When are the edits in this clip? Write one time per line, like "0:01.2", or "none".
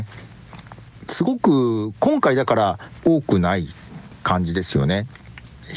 0:01.0
0:03.0